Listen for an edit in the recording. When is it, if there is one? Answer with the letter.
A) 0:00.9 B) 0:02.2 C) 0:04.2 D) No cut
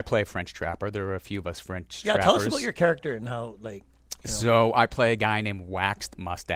D